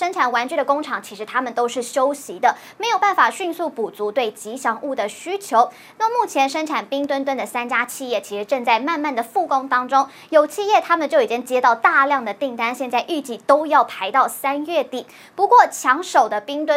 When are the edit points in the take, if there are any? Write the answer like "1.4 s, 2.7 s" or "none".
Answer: none